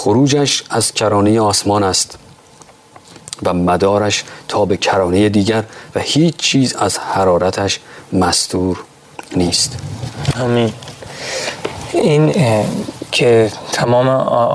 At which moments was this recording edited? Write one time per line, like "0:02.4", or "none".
0:12.3